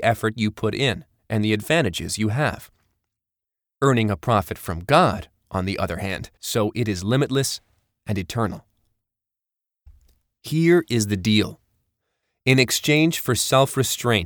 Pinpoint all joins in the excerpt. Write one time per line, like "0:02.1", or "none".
0:01.2
0:06.4